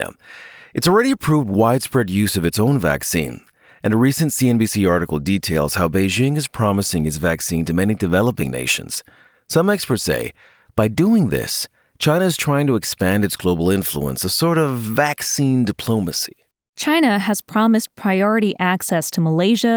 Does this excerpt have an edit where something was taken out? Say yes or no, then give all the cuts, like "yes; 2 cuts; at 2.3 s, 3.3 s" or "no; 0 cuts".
no; 0 cuts